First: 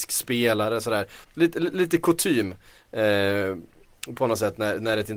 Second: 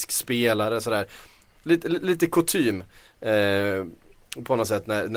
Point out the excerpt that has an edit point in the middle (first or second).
first